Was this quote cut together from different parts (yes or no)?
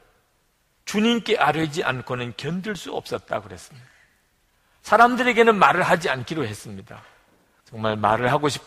yes